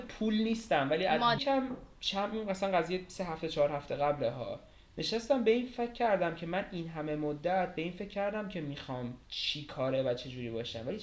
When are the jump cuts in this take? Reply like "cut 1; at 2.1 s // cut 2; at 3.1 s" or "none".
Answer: cut 1; at 1.4 s // cut 2; at 9.2 s